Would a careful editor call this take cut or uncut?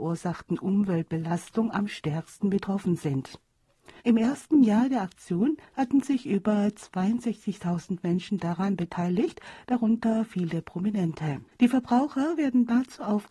cut